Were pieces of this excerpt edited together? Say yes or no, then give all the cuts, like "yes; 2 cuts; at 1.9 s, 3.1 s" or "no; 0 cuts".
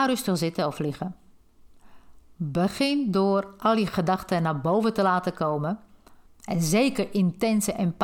yes; 1 cut; at 6.3 s